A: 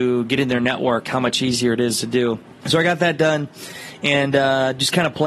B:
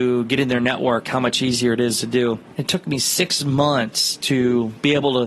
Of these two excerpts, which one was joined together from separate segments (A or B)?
B